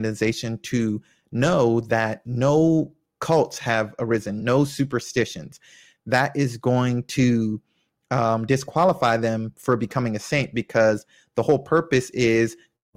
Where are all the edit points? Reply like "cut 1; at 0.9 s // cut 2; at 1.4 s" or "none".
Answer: cut 1; at 4.4 s